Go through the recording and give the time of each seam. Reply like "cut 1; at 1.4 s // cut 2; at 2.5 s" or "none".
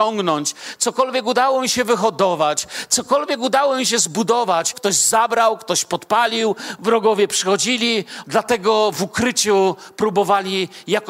cut 1; at 4.7 s // cut 2; at 8.2 s